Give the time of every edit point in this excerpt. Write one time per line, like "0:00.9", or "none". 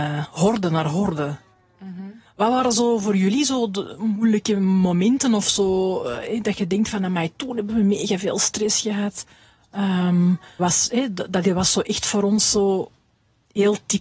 0:10.6